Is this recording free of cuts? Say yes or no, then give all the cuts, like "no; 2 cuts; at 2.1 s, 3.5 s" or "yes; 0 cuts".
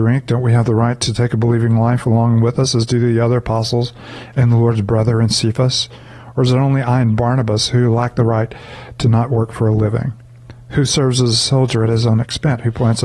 yes; 0 cuts